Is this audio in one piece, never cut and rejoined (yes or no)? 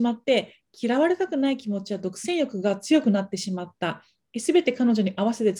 yes